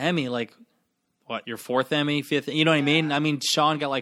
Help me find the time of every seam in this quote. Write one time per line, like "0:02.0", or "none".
none